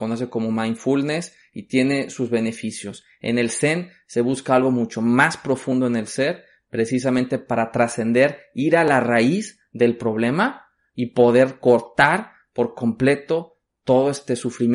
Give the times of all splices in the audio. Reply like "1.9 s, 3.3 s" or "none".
none

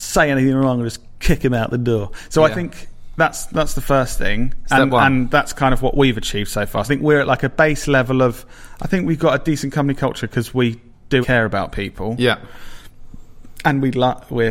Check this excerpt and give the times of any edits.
6.8 s, 11.2 s

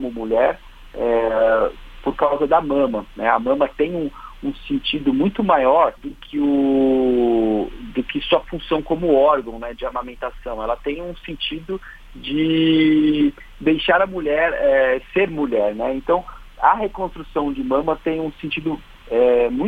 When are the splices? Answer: 6.0 s

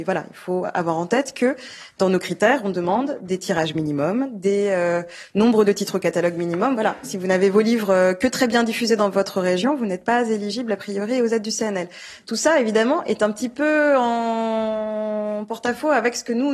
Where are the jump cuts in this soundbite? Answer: none

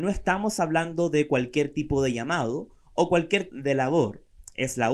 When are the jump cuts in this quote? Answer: 3.5 s

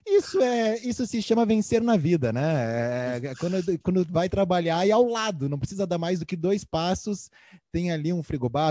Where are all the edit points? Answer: none

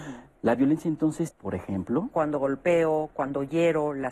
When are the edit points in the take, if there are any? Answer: 1.3 s

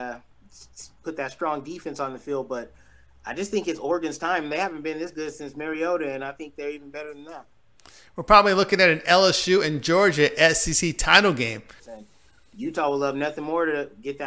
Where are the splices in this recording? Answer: 11.8 s

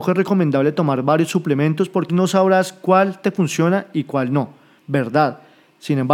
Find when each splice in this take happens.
2.1 s, 4.8 s

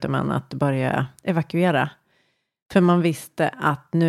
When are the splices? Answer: none

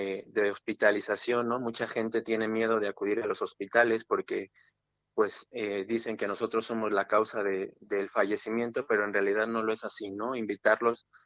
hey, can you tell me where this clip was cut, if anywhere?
none

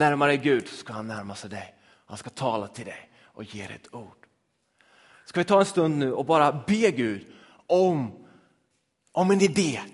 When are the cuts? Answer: none

